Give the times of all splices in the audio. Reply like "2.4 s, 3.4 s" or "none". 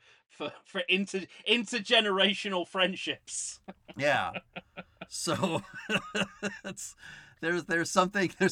none